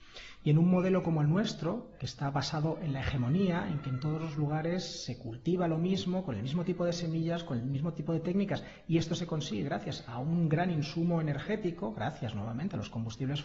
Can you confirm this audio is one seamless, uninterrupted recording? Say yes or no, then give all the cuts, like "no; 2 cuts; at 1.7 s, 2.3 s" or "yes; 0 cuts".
yes; 0 cuts